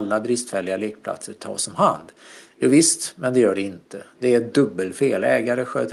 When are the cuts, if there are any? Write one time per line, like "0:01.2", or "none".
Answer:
none

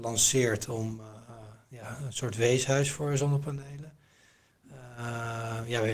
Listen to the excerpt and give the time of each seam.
none

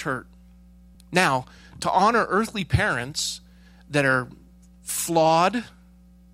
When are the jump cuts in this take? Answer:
0:00.9

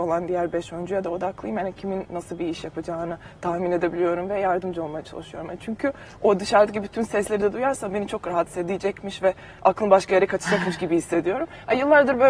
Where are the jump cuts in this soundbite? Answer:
none

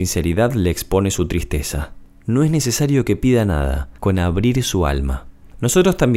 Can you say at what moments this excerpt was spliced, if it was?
0:04.0

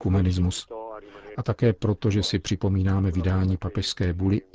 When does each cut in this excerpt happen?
0:01.3

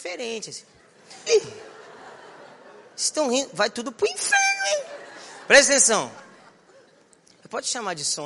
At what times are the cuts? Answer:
0:01.3

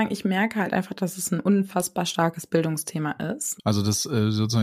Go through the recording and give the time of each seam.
0:03.6

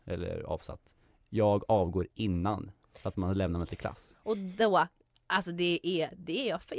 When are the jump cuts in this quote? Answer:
0:04.1

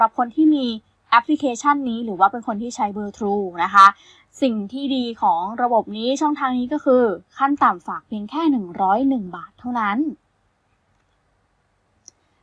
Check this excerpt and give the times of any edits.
none

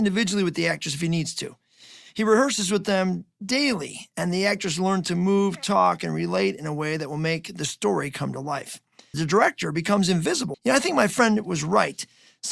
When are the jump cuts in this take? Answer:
0:09.1
0:10.5

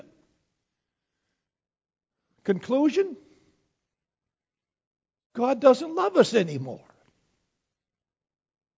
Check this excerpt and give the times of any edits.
none

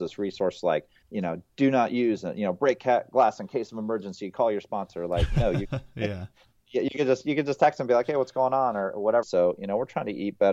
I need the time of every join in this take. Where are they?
0:09.2

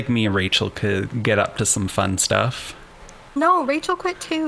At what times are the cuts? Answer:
none

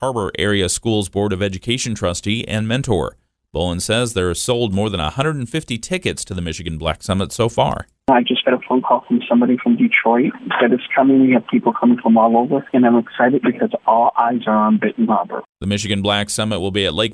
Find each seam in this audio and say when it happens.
none

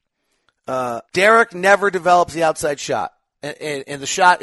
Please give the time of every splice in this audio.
0:01.0

